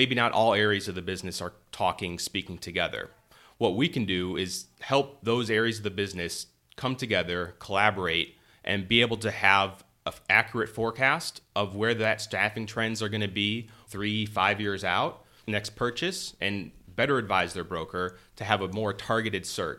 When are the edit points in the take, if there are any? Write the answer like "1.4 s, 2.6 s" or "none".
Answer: 13.9 s, 15.4 s